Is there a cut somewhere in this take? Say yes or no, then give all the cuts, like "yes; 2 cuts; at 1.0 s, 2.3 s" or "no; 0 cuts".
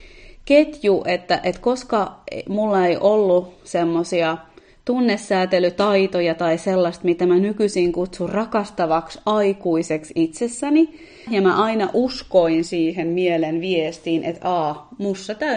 yes; 1 cut; at 11.3 s